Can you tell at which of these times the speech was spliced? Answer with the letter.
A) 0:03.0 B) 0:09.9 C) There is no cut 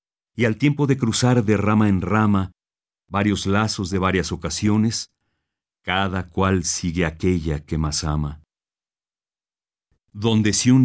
B